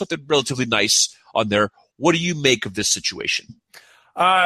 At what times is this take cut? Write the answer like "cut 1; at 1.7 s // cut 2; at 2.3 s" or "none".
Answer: none